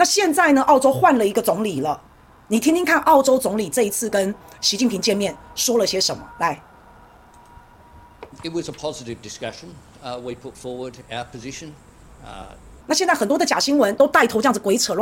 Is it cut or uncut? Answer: cut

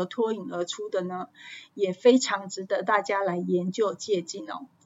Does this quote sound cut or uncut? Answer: uncut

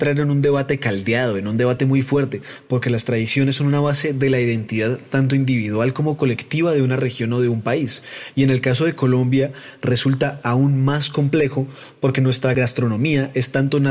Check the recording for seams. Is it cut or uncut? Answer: uncut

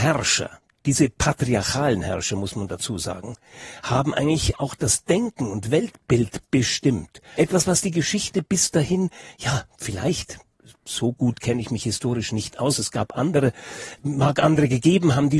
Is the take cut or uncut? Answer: cut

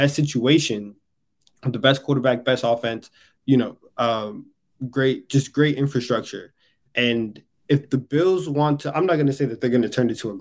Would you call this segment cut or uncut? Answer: uncut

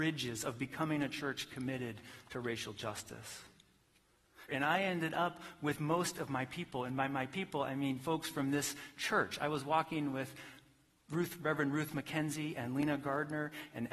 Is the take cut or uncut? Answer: cut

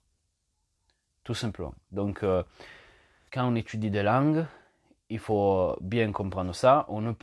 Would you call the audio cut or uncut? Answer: cut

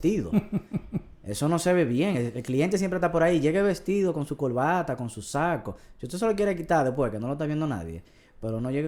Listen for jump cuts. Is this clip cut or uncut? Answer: uncut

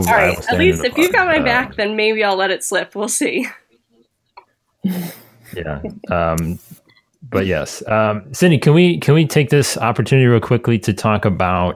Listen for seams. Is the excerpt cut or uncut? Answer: uncut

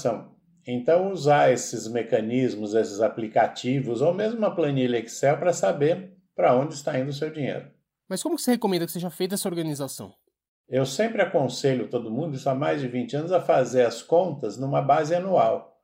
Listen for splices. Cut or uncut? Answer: uncut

